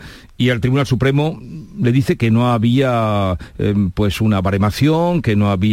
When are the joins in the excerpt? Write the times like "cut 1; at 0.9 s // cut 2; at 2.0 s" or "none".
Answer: none